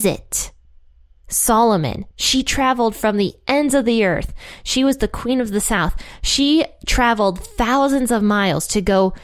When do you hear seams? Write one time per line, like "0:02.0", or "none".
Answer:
none

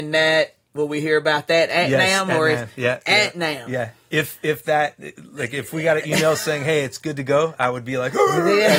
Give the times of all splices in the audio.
none

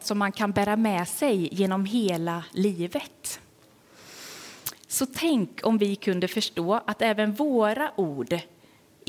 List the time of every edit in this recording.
none

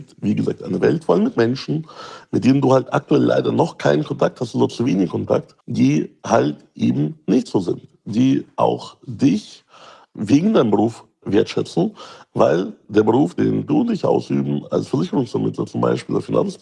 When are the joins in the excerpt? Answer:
0:05.6

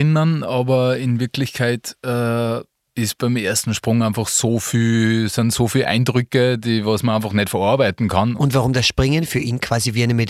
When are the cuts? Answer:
0:08.4

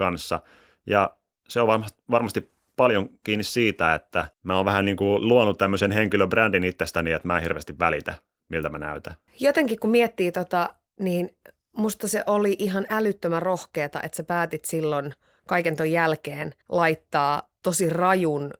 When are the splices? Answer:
0:04.3
0:09.3
0:16.6

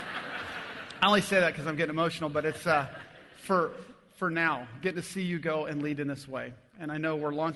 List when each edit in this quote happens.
none

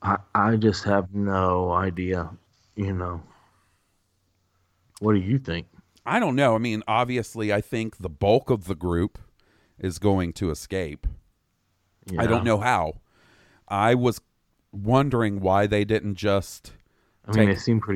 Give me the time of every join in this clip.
none

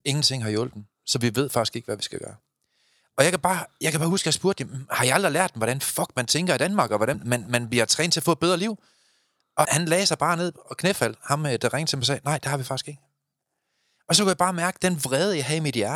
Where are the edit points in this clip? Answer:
0:07.1
0:09.6

